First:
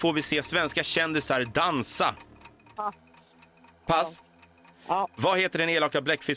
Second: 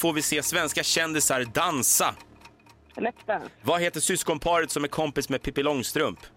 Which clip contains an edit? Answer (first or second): first